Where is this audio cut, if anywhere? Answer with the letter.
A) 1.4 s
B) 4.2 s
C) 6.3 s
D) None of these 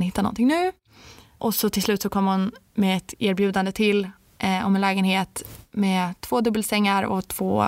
A